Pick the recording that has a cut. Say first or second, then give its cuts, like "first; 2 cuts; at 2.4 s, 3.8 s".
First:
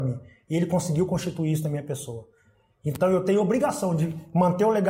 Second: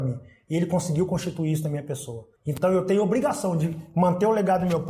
second; 1 cut; at 2.4 s